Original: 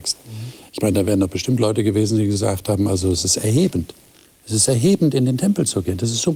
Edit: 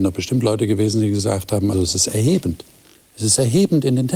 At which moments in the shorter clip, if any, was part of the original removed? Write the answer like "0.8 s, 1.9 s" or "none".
1.7 s